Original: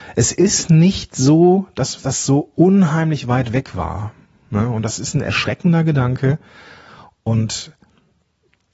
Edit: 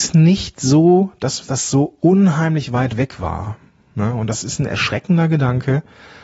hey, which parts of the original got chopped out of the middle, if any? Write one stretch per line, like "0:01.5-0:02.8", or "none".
none

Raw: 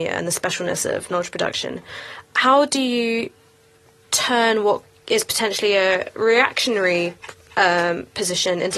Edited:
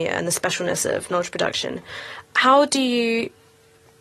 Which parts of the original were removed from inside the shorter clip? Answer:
none

